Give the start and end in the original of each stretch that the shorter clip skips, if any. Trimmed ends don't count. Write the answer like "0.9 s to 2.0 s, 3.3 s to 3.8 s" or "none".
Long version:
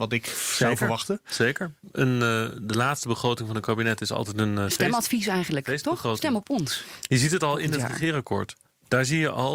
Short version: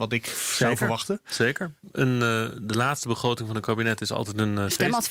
none